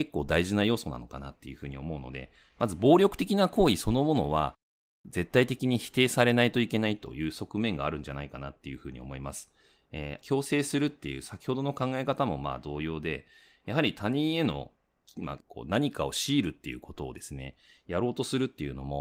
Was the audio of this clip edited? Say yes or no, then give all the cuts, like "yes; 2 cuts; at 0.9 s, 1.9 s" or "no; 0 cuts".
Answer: yes; 2 cuts; at 10.2 s, 15.4 s